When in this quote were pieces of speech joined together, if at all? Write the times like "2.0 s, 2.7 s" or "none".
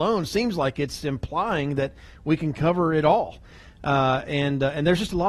none